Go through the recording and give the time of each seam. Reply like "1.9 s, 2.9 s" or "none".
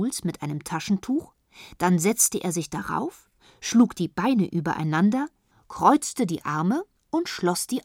none